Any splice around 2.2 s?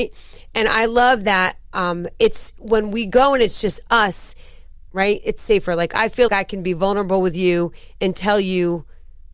no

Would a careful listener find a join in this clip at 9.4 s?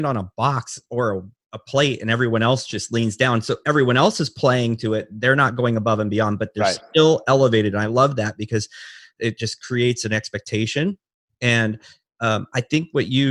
no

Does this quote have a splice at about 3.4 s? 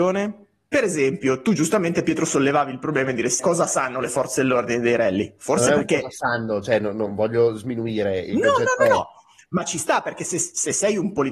yes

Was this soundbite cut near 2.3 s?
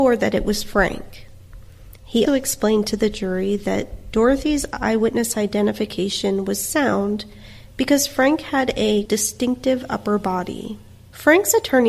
yes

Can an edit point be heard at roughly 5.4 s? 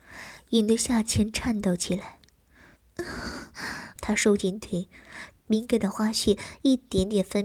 yes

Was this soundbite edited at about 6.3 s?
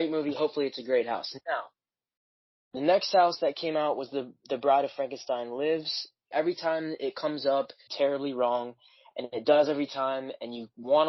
yes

